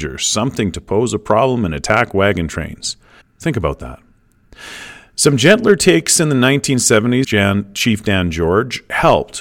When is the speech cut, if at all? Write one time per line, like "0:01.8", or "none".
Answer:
0:03.2
0:07.2